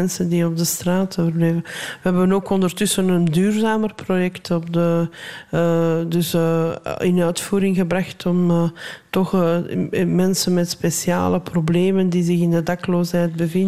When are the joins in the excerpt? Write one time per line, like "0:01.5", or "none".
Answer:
none